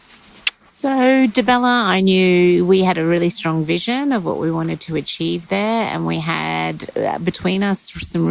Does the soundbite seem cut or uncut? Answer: uncut